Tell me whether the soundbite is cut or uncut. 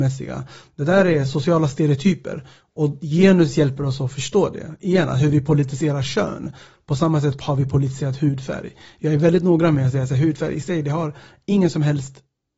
uncut